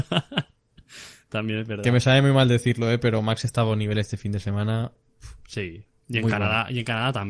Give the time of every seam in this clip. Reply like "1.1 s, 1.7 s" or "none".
none